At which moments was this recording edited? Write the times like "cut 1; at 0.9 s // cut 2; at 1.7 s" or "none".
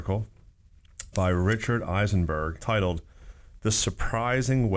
cut 1; at 1.1 s // cut 2; at 2.6 s